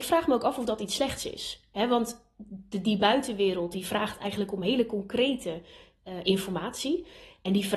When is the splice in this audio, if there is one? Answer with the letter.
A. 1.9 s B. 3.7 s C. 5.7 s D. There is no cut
B